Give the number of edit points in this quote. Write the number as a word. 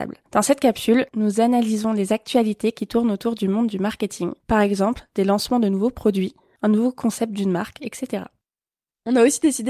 zero